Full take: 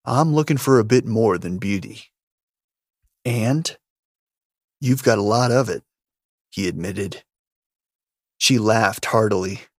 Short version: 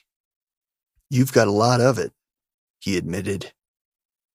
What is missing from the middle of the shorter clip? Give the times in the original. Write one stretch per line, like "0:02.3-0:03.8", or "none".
0:03.1-0:04.8